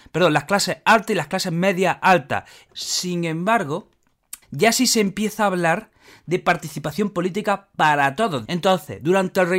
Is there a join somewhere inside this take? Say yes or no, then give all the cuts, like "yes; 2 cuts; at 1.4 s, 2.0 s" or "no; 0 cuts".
yes; 3 cuts; at 2.7 s, 4.4 s, 8.5 s